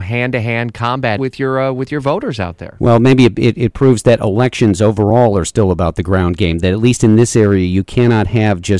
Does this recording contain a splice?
yes; 1 cut; at 1.2 s

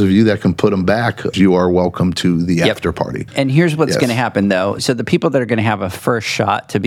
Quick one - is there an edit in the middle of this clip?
yes; 1 cut; at 1.3 s

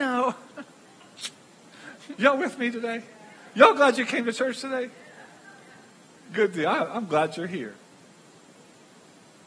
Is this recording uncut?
no; 1 cut; at 2.2 s

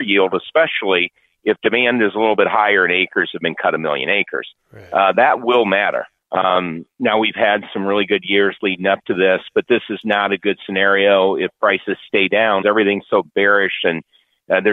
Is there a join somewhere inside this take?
yes; 2 cuts; at 6.2 s, 12.6 s

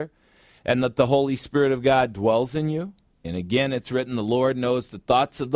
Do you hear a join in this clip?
yes; 1 cut; at 3.2 s

